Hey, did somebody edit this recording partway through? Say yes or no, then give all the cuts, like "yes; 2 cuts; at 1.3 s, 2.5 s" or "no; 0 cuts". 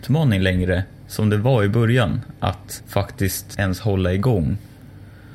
no; 0 cuts